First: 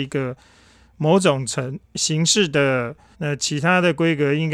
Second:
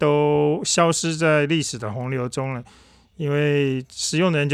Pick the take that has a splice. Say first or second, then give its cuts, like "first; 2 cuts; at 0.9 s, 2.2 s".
first; 1 cut; at 3.1 s